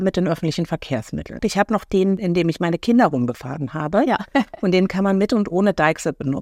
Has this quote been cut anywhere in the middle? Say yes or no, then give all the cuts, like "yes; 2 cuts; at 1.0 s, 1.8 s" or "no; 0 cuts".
yes; 1 cut; at 1.4 s